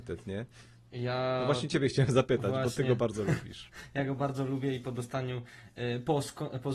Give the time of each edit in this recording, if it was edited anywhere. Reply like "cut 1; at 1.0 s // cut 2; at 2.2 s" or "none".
none

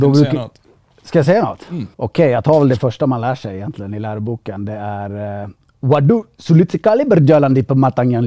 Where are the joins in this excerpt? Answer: cut 1; at 1.9 s

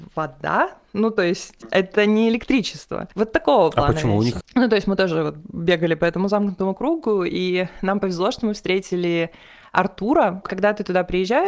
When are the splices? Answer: cut 1; at 4.4 s // cut 2; at 10.4 s

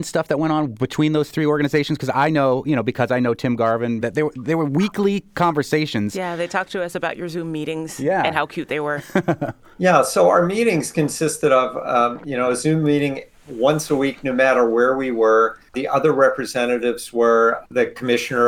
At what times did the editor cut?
cut 1; at 4.0 s

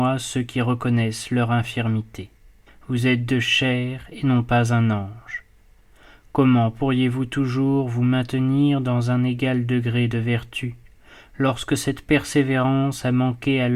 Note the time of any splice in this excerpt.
cut 1; at 2.7 s

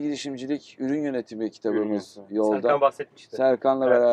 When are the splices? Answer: none

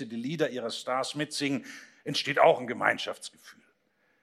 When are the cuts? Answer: none

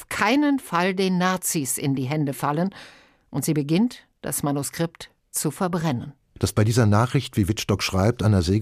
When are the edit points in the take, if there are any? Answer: none

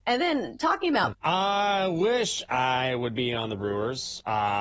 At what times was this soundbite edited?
cut 1; at 1.1 s

